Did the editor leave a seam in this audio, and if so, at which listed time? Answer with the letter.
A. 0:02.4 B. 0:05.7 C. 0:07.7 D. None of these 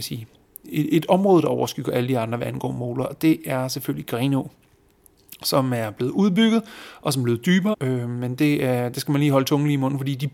C